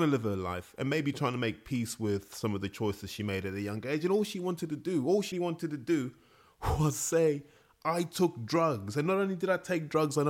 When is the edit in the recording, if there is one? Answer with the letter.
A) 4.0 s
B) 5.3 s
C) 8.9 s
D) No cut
B